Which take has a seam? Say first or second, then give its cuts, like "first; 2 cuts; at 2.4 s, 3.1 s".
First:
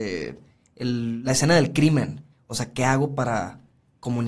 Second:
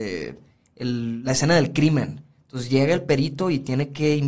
first; 1 cut; at 2.3 s